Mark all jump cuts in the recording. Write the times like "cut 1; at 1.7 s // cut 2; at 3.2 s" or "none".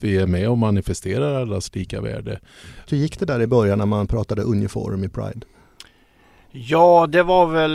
cut 1; at 2.9 s